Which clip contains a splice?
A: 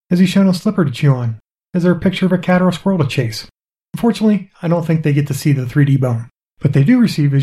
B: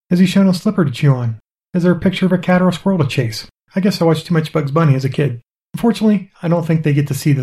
B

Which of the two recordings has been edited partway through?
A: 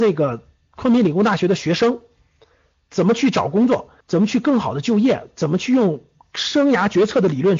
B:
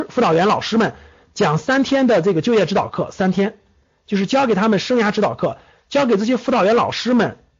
A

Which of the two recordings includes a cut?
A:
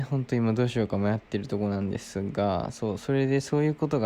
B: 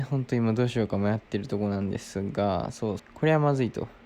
B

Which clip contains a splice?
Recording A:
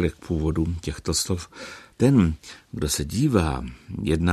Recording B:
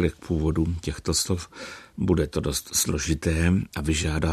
A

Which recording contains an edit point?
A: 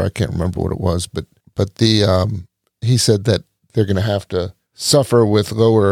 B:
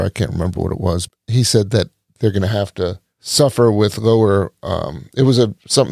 B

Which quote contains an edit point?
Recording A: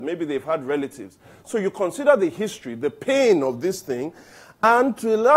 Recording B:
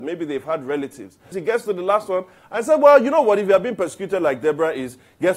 B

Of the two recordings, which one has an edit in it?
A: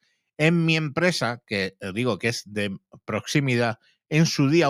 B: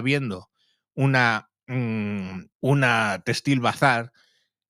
B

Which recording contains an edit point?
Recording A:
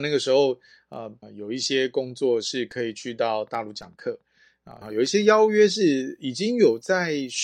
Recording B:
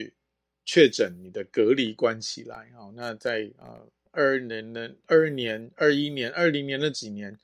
A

